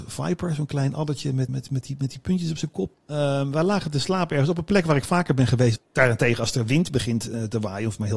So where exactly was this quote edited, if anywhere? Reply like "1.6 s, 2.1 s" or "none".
1.5 s, 2.9 s, 5.8 s